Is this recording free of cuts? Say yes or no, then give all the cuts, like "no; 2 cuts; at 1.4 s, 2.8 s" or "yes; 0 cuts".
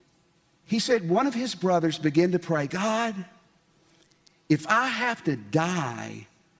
yes; 0 cuts